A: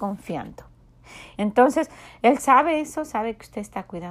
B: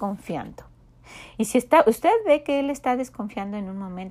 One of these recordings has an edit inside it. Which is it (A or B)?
A